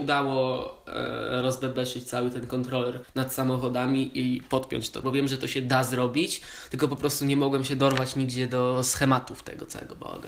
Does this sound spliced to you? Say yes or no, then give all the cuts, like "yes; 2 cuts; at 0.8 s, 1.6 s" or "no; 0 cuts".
yes; 2 cuts; at 3.0 s, 5.0 s